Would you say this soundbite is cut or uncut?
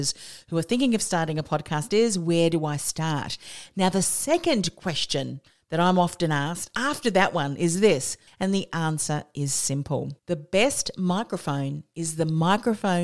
cut